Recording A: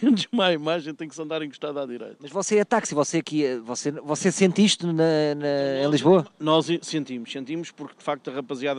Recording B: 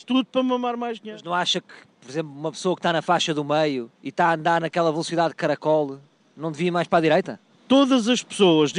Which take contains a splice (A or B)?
B